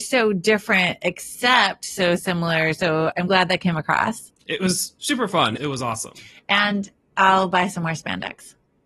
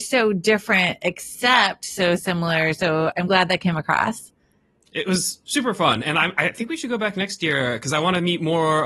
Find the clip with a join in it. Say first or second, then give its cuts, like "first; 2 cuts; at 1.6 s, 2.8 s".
first; 2 cuts; at 4.4 s, 5.6 s